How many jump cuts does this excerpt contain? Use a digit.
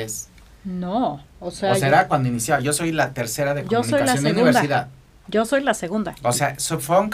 0